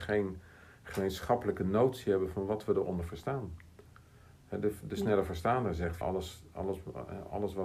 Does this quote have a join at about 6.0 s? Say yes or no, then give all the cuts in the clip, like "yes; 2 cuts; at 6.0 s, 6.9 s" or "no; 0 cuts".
yes; 1 cut; at 6.0 s